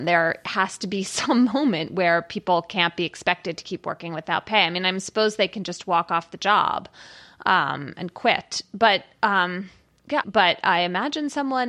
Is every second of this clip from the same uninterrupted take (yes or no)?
no